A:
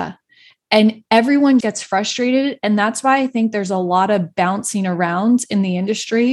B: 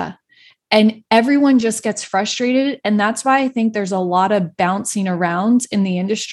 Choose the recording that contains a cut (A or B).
A